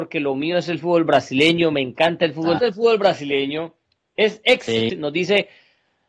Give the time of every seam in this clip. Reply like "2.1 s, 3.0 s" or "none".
2.6 s, 4.9 s